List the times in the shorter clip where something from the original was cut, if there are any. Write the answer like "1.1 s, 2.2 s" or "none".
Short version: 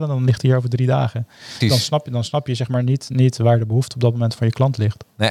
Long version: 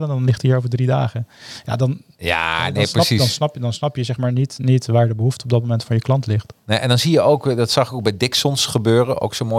1.6 s